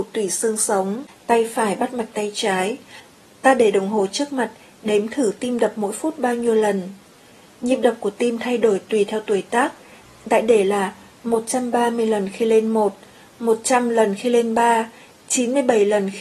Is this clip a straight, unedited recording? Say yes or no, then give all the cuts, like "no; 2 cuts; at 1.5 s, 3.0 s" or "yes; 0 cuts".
yes; 0 cuts